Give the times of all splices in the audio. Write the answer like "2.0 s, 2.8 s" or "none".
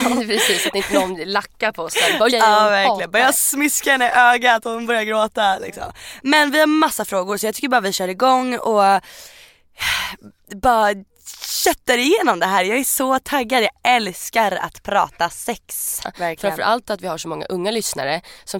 2.3 s, 16.0 s